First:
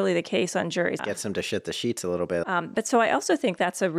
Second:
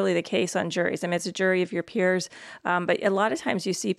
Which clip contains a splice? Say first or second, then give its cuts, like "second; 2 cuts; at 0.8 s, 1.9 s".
first; 2 cuts; at 1.0 s, 2.4 s